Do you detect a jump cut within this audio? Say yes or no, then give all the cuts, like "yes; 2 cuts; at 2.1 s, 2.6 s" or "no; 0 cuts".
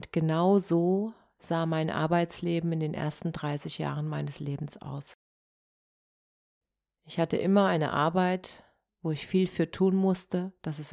yes; 1 cut; at 8.9 s